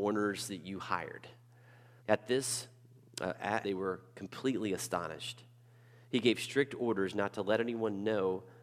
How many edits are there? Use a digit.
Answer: 2